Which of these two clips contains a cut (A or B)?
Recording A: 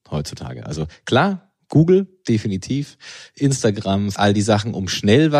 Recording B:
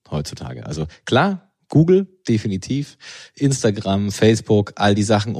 A